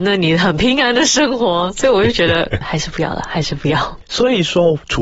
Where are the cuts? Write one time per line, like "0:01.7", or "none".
0:02.6